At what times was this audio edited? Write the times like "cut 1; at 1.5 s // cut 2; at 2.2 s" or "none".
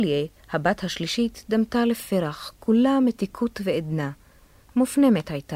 none